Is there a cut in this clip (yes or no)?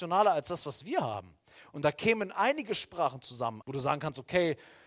yes